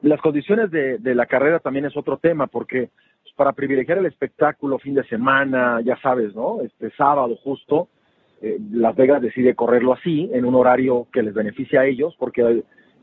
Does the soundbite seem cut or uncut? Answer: uncut